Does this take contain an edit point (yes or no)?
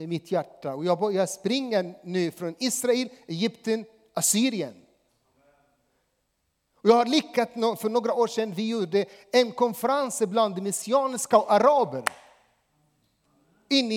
no